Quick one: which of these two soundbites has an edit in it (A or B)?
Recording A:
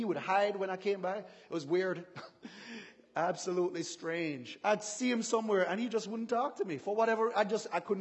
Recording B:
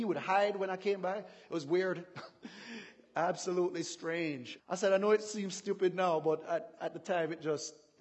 B